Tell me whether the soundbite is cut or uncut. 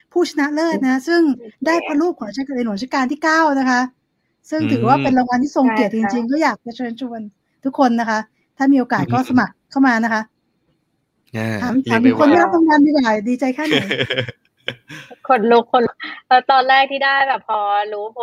uncut